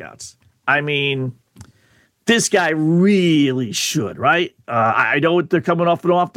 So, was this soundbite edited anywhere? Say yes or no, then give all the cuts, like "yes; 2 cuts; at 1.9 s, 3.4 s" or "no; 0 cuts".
no; 0 cuts